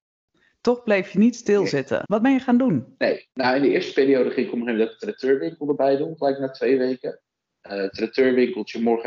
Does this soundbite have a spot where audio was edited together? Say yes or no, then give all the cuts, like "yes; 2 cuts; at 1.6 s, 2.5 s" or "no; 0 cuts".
yes; 3 cuts; at 2.1 s, 3.3 s, 7.5 s